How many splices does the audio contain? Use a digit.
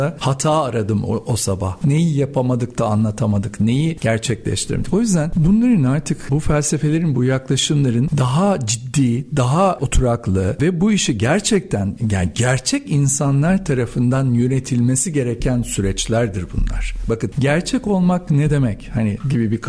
0